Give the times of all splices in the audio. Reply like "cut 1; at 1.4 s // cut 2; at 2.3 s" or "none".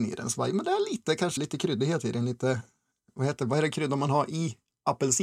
cut 1; at 1.4 s